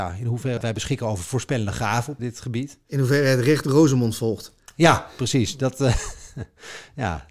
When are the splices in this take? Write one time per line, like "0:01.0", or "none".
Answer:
0:02.2